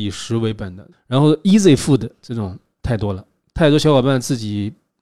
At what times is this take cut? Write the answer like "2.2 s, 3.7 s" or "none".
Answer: 0.9 s